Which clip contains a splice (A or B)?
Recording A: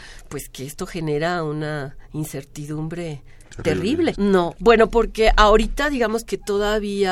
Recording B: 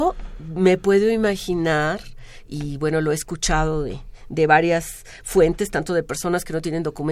A